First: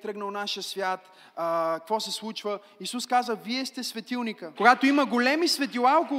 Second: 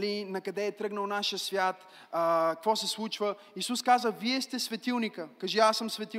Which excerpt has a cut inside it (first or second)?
first